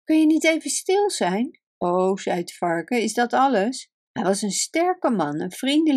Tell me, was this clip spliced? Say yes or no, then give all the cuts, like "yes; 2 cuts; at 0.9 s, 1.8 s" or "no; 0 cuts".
yes; 2 cuts; at 1.7 s, 3.9 s